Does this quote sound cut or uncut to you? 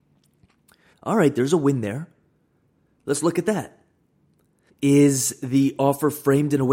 cut